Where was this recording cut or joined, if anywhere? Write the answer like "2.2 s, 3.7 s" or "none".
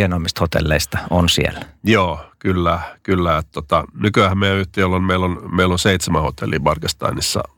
none